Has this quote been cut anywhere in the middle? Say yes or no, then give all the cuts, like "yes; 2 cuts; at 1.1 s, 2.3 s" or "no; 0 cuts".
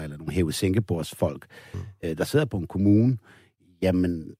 no; 0 cuts